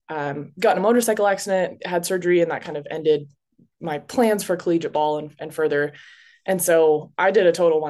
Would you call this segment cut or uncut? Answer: uncut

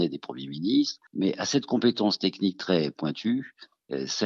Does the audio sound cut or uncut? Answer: cut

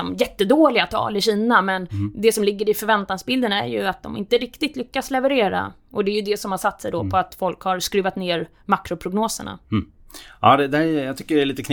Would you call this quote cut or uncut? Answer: uncut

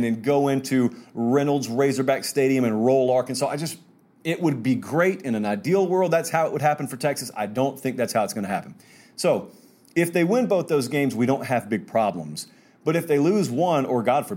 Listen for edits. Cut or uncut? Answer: uncut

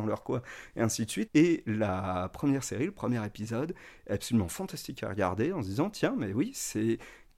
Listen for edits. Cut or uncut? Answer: cut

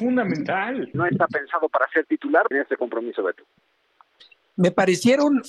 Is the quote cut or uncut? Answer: cut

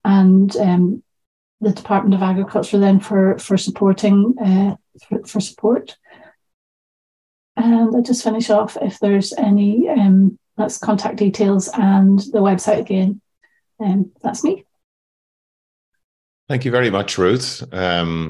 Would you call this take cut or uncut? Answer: uncut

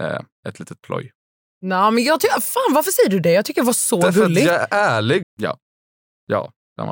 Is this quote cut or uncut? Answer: cut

